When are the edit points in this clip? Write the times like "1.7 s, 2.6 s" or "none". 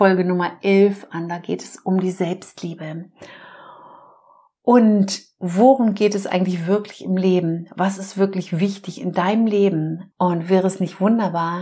10.1 s